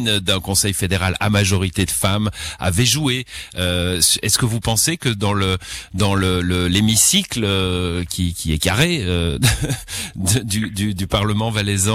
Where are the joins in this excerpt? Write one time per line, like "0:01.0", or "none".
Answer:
none